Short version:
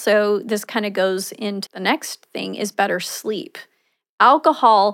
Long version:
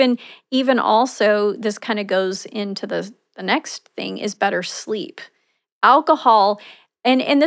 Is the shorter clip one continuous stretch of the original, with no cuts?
no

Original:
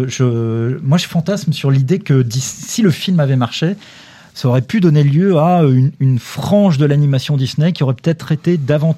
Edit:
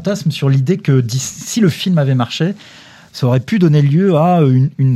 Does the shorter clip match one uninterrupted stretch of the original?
yes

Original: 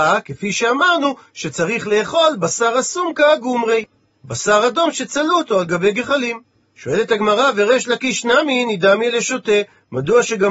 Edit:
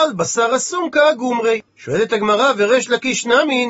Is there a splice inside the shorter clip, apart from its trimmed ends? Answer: yes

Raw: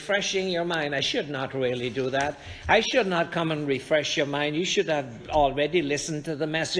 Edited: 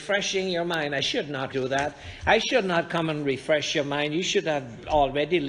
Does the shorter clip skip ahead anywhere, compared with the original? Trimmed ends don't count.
yes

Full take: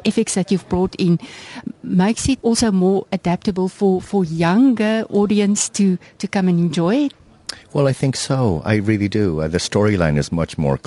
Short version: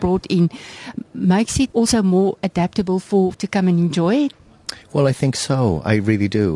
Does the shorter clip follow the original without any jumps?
no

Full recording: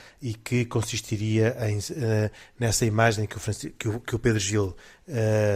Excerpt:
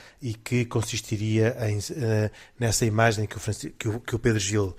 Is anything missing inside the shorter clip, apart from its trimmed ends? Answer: no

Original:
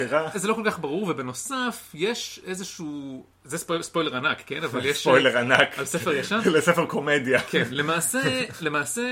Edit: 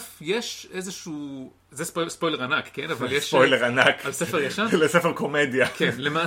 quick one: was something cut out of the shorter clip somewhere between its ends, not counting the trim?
no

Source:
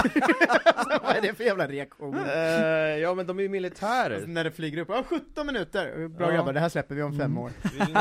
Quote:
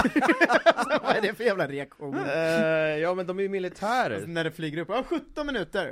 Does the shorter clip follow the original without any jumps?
yes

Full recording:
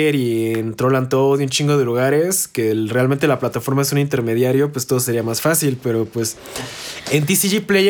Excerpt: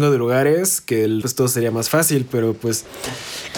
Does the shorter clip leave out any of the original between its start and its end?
yes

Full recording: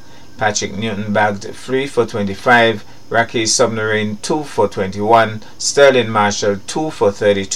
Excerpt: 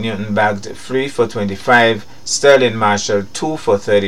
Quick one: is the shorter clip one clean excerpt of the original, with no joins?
no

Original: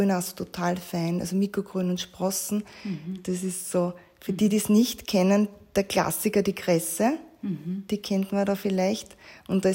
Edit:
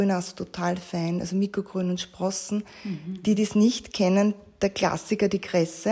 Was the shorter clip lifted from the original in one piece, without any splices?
no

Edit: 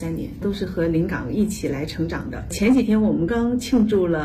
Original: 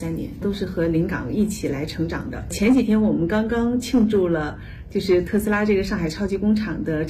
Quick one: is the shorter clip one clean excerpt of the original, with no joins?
no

